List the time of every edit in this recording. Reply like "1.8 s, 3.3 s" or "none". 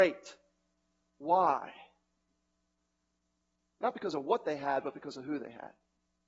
none